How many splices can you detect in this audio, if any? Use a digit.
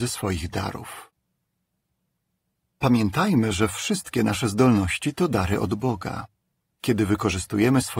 1